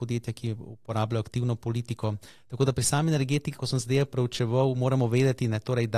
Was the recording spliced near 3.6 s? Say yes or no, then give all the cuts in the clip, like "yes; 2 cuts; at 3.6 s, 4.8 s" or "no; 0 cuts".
yes; 1 cut; at 3.6 s